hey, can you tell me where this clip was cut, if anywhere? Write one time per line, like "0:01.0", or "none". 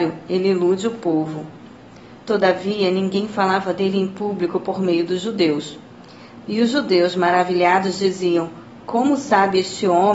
0:06.4